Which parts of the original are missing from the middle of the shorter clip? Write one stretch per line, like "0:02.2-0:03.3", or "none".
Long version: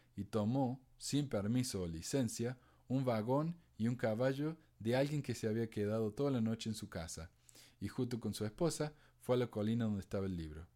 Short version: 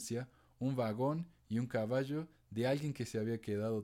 none